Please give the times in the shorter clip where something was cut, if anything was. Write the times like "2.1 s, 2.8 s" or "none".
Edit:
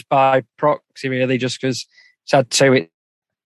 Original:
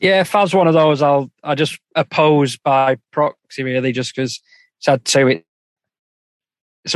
none